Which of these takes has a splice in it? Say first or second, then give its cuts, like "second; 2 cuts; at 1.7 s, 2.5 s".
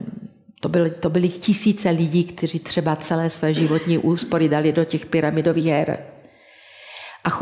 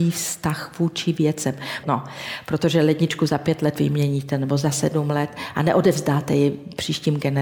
second; 1 cut; at 1.8 s